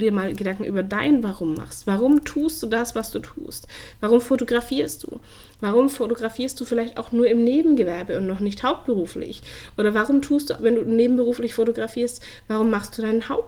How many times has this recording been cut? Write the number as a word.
one